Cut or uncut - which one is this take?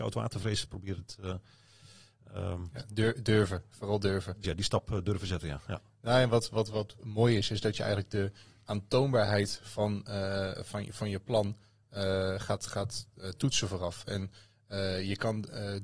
cut